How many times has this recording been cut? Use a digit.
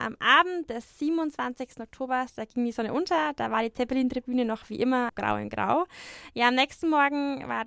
1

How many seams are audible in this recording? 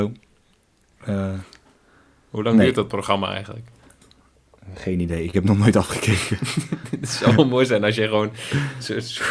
0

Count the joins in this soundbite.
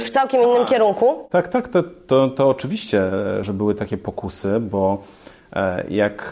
1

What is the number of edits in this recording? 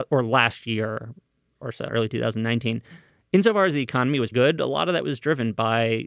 2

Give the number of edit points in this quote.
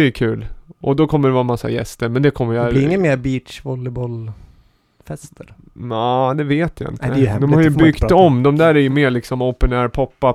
0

